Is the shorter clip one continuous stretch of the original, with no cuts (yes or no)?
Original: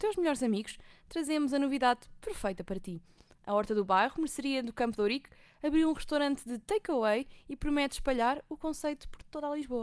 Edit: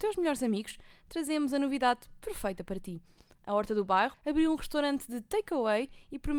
no